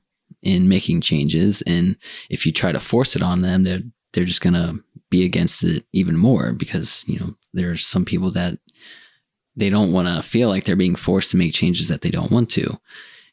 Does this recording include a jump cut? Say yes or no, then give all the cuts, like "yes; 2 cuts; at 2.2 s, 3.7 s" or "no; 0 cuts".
no; 0 cuts